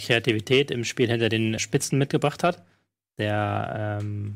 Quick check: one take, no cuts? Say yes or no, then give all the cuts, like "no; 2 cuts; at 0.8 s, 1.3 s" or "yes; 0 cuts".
no; 1 cut; at 1.6 s